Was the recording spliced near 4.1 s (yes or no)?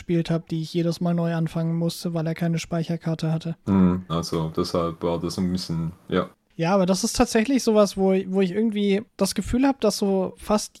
yes